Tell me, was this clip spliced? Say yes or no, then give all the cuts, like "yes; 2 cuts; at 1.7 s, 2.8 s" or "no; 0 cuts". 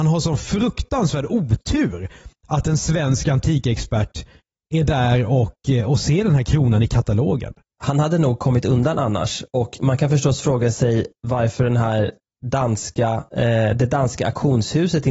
no; 0 cuts